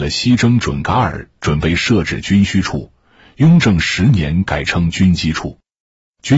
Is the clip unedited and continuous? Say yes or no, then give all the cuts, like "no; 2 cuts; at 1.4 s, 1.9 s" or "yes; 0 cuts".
yes; 0 cuts